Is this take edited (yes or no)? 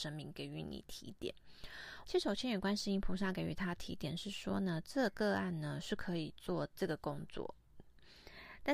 yes